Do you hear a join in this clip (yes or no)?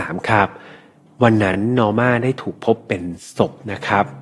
no